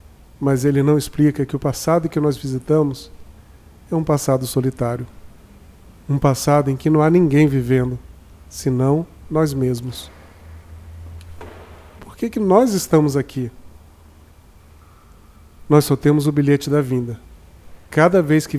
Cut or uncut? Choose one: cut